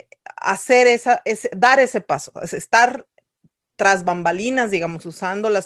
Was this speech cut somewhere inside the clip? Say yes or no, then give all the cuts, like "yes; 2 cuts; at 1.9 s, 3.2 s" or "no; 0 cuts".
no; 0 cuts